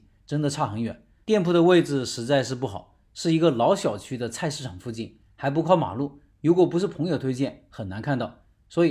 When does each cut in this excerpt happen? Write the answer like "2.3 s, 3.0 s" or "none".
1.2 s